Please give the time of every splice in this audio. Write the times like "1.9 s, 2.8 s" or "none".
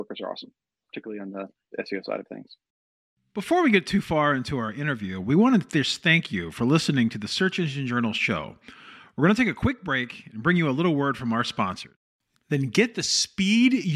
12.4 s